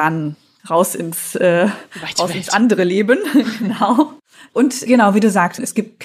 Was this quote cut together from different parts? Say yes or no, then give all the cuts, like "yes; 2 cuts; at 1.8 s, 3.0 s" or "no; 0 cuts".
no; 0 cuts